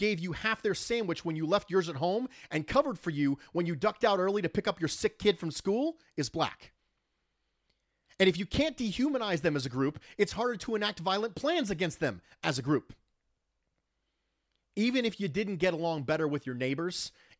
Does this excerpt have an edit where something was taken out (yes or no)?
no